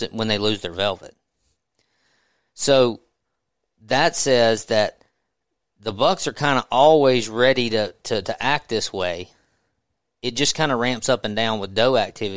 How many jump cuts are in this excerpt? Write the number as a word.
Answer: zero